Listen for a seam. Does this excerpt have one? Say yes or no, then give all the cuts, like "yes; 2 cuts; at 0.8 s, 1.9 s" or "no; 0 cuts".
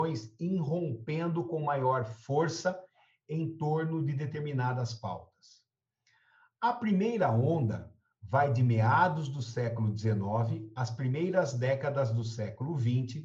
no; 0 cuts